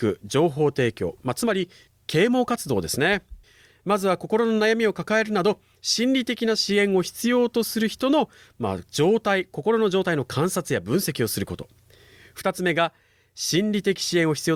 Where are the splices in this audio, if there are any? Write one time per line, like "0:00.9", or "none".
0:03.7